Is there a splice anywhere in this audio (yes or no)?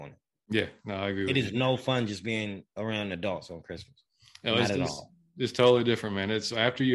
no